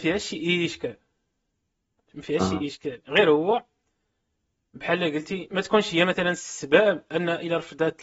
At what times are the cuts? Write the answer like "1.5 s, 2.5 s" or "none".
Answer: none